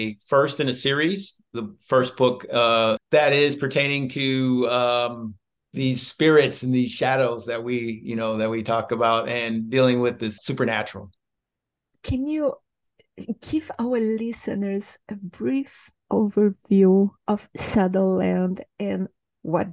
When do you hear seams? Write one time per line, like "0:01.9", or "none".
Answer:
0:03.0
0:10.4